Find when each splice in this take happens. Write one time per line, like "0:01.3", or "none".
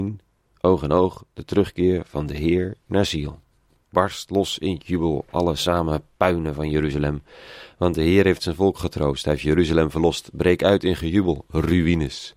none

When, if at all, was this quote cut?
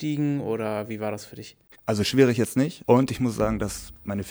0:01.8

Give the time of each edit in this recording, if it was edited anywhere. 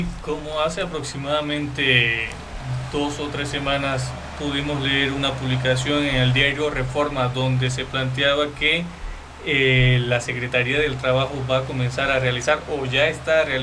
none

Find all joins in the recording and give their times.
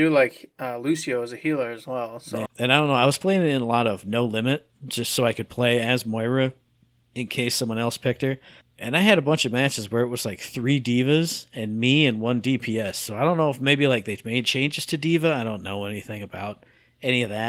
0:02.5

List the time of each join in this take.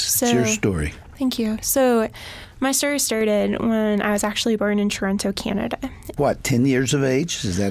0:06.2

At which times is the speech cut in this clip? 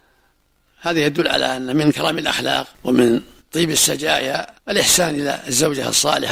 0:02.7
0:04.6

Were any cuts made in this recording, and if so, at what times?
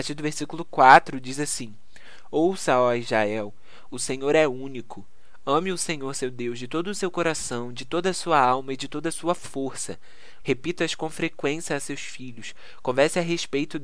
0:03.9
0:10.4

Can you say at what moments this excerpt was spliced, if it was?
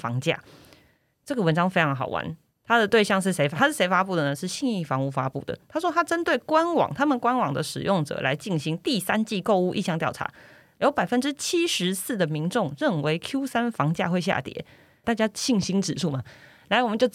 0:15.0

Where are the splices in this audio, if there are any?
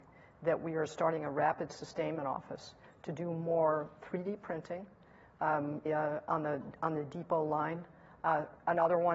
0:05.9

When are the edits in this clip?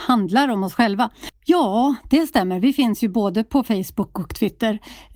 0:01.3

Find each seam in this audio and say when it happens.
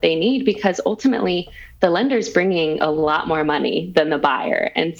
none

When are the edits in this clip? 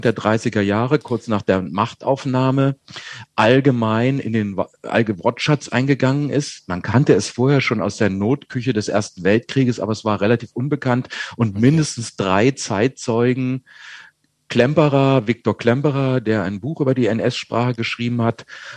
none

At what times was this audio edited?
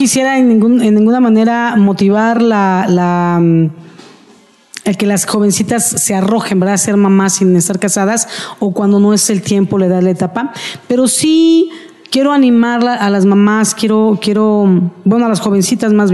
none

